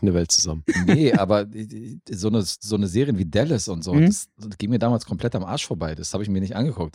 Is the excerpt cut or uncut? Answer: uncut